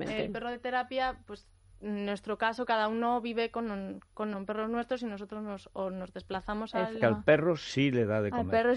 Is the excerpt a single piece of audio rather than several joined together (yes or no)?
no